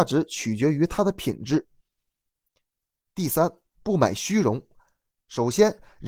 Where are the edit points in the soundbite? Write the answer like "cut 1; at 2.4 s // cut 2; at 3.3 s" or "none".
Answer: none